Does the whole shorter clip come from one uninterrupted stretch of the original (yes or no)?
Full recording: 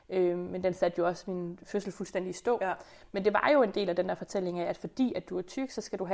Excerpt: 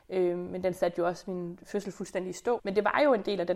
no